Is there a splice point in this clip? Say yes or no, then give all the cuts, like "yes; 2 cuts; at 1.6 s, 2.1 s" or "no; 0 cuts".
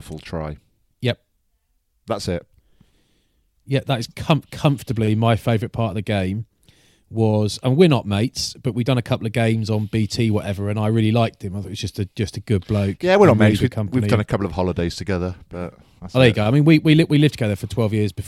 no; 0 cuts